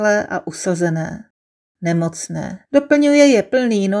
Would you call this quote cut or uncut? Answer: cut